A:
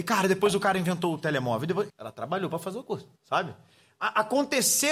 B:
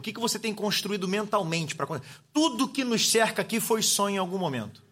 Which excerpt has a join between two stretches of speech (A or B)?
A